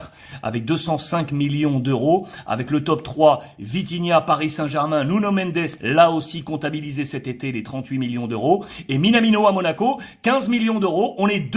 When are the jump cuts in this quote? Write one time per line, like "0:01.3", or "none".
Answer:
0:05.8